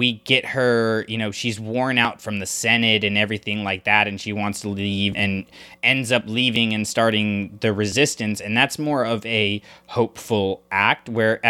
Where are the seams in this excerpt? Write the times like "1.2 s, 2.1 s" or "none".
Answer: 5.1 s

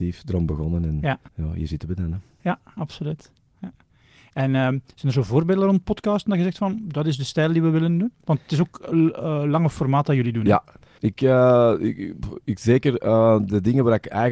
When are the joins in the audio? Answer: 1.3 s, 11.0 s

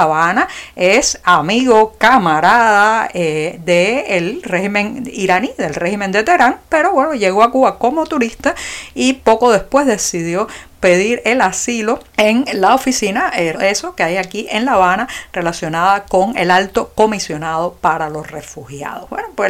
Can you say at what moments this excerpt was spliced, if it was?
12.1 s, 13.5 s

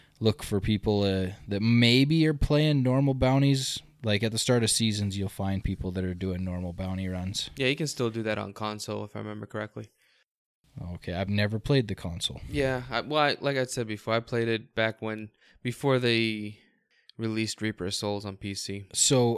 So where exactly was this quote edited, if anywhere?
11.3 s

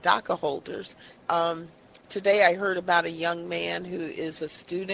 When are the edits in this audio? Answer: 1.2 s

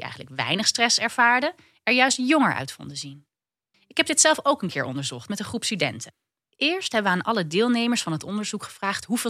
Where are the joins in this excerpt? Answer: 3.7 s

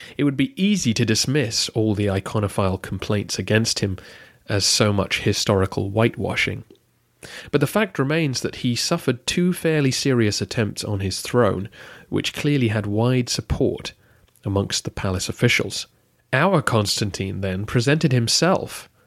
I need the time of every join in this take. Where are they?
16.2 s

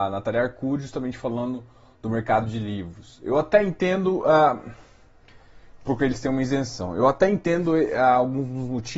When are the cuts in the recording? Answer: none

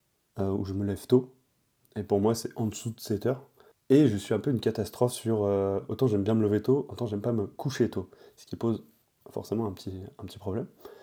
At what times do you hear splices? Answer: 3.7 s

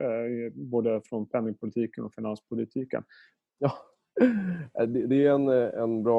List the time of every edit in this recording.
3.5 s

